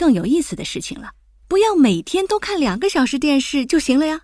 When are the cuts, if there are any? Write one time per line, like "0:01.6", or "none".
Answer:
0:01.4